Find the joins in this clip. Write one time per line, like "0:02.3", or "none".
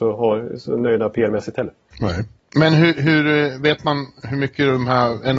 none